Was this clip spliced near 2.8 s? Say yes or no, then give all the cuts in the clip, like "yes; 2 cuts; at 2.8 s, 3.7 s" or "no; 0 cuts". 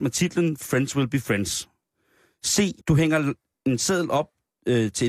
yes; 1 cut; at 2.8 s